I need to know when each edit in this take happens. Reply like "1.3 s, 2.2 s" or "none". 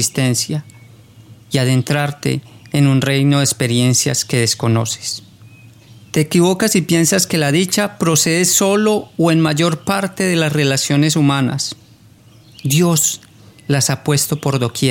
none

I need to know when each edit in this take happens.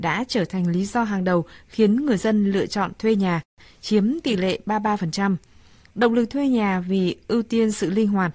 none

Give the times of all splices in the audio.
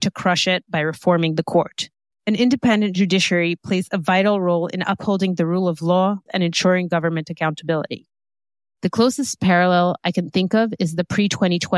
2.1 s, 6.3 s, 8.8 s

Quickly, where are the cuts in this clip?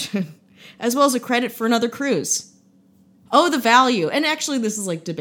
3.3 s

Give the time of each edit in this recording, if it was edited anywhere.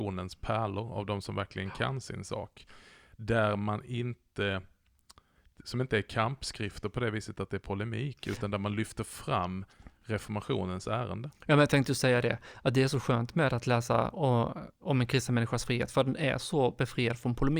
none

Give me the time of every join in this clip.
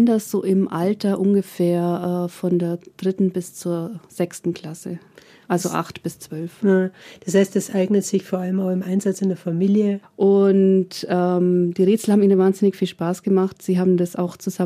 10.0 s

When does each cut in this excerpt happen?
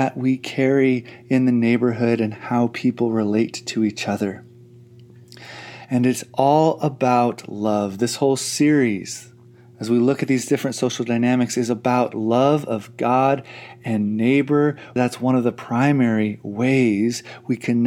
15.0 s

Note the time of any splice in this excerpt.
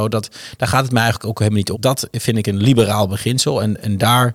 1.7 s

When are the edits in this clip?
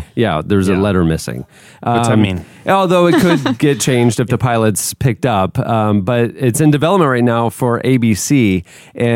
none

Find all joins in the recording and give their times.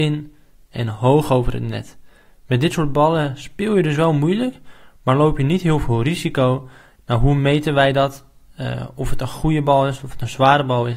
7.0 s

